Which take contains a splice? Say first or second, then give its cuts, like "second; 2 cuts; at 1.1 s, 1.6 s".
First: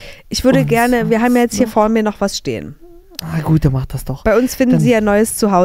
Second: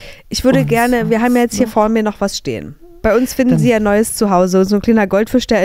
second; 1 cut; at 3.0 s